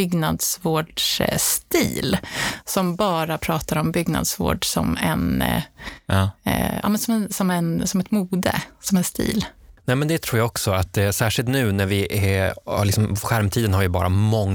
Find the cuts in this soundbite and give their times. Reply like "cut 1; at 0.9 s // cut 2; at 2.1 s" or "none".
none